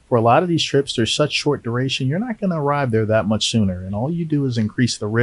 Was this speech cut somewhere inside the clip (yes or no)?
no